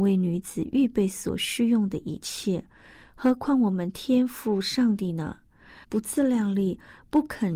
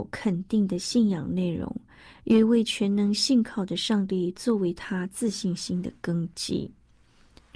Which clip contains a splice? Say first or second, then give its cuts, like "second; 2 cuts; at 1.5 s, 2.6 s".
first; 1 cut; at 5.8 s